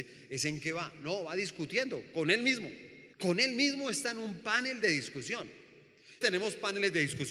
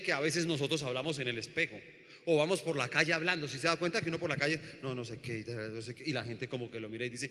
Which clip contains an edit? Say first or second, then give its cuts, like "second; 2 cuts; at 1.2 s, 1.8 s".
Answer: first; 2 cuts; at 3.1 s, 6.2 s